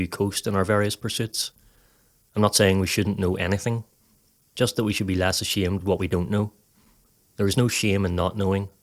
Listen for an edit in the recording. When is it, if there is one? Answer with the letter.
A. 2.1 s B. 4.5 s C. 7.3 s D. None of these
D